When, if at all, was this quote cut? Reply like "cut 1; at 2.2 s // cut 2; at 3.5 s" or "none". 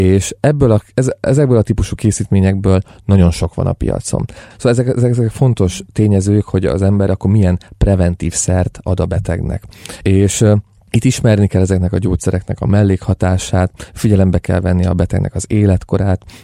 cut 1; at 4.5 s // cut 2; at 10.0 s